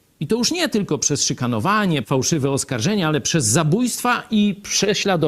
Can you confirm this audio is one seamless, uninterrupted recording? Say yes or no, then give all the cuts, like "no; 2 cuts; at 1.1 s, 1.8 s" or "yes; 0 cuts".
no; 1 cut; at 2.0 s